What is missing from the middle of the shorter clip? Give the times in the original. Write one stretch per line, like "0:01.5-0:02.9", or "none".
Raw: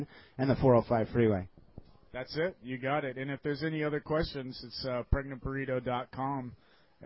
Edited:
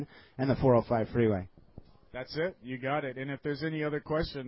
none